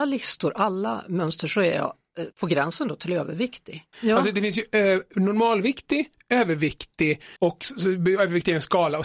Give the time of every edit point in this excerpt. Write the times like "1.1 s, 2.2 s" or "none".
2.3 s, 3.9 s, 7.4 s